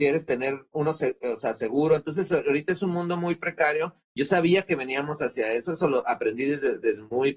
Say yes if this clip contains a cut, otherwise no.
no